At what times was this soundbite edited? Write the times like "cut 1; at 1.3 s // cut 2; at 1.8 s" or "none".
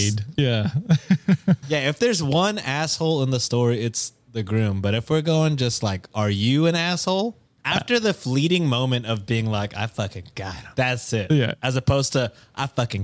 cut 1; at 7.6 s // cut 2; at 10.7 s